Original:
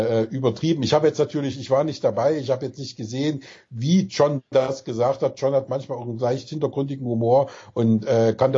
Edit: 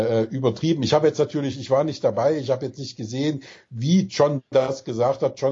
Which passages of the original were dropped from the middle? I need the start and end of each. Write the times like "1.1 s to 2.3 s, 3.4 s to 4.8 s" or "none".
none